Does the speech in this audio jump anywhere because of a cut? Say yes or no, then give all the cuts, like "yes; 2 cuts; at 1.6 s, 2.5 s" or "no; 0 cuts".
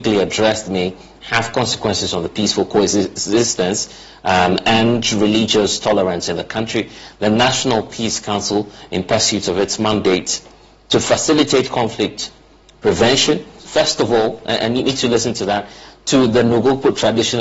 yes; 1 cut; at 13.6 s